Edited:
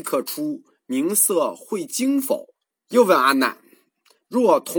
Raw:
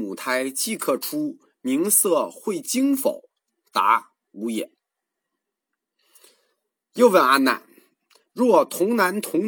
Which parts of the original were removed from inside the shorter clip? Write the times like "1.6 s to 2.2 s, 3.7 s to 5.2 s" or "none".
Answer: 3.5 s to 6.8 s